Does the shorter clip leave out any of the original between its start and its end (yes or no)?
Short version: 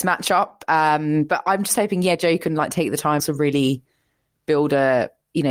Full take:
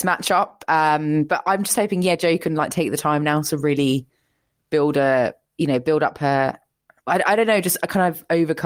yes